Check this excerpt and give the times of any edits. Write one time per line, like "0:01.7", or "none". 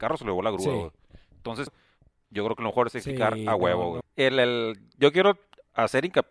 0:01.7
0:04.0